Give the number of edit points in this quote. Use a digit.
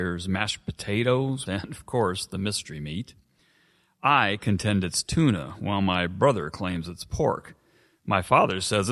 1